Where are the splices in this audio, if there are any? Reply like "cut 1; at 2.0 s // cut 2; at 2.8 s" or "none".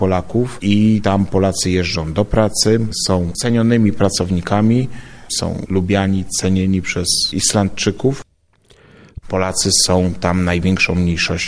cut 1; at 9.2 s